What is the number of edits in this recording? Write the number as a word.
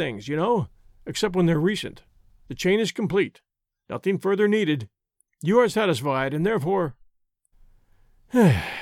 two